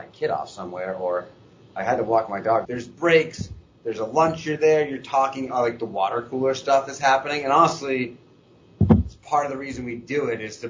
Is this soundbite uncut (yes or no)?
no